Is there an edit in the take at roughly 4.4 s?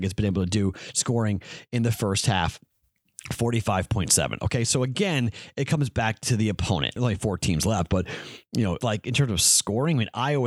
no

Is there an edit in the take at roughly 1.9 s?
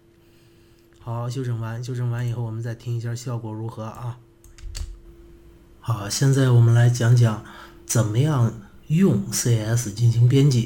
no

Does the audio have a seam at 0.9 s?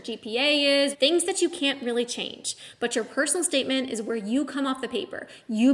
yes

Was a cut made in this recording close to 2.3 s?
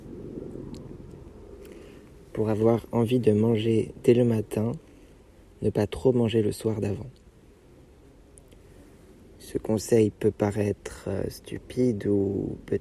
yes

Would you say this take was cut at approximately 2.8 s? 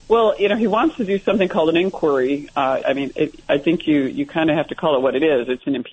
yes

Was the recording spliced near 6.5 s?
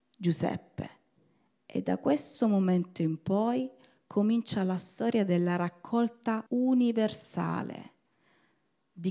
yes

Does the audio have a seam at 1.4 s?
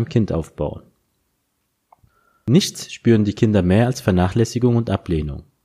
no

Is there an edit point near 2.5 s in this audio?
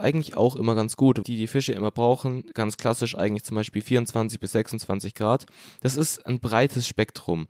no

